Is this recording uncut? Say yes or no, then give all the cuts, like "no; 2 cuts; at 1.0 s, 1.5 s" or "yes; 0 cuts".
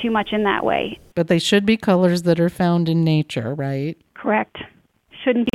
no; 2 cuts; at 1.1 s, 4.1 s